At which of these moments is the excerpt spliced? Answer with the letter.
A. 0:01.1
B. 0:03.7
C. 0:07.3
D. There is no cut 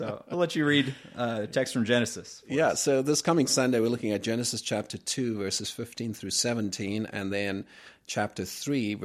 D